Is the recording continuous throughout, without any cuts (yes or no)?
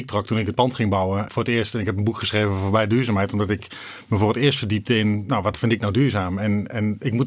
no